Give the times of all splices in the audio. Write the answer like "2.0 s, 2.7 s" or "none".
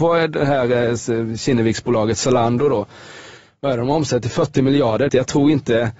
5.1 s